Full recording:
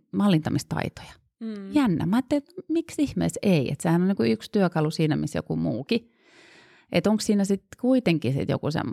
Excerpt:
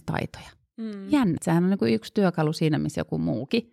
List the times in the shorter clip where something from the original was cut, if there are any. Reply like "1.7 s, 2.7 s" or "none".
1.4 s